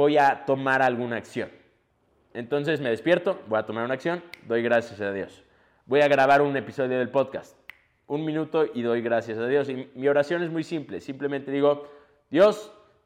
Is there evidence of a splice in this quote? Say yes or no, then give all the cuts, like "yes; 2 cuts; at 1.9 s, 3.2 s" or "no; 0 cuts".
no; 0 cuts